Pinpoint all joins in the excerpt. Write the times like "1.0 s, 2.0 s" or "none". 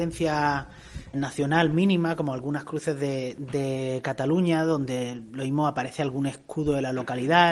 1.1 s